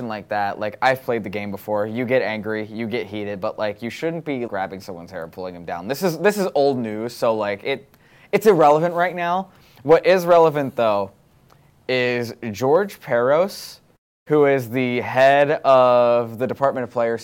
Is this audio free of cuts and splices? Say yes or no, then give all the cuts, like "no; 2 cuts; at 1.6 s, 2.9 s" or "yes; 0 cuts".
no; 1 cut; at 4.5 s